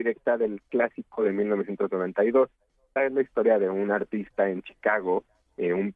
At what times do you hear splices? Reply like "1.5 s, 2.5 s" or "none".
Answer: 3.0 s